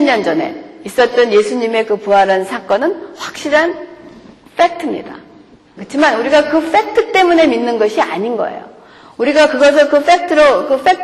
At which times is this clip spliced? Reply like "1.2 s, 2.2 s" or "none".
5.8 s

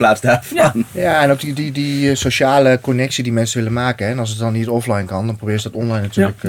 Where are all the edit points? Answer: none

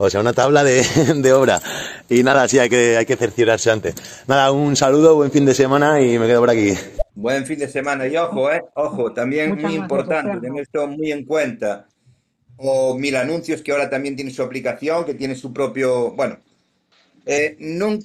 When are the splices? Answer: 7.1 s, 12.5 s

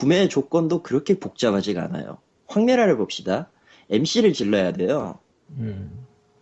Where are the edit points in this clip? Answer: 5.5 s

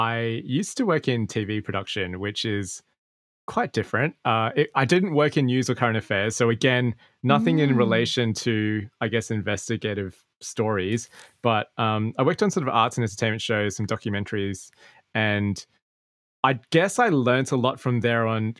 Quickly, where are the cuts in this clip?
none

